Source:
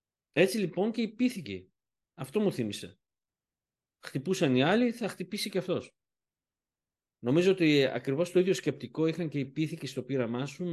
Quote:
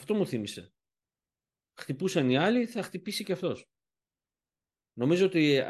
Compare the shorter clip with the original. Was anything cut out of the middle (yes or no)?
no